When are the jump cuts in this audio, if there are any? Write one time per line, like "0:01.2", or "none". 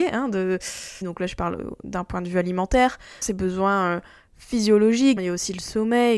0:01.0
0:03.2
0:05.2